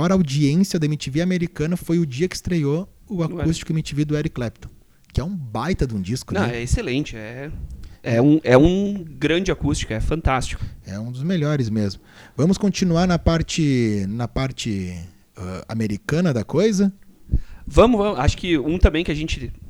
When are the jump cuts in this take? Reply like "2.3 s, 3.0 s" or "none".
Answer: none